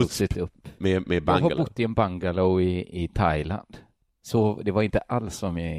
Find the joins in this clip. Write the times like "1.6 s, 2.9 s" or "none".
none